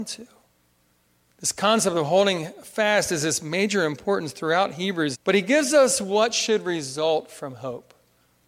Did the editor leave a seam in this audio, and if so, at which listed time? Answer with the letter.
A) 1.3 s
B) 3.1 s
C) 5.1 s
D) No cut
C